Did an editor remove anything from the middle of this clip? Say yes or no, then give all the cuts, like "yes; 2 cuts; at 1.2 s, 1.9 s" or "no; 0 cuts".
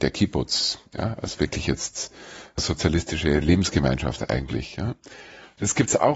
no; 0 cuts